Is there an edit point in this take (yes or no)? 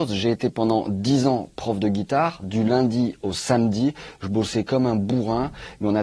no